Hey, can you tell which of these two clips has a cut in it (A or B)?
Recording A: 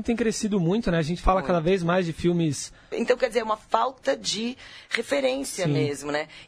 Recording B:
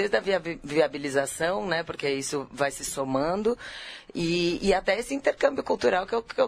A